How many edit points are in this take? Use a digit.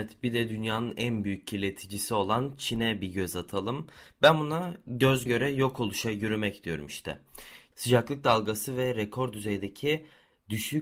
2